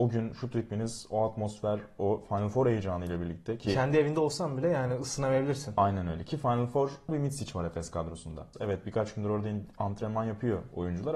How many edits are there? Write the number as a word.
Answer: two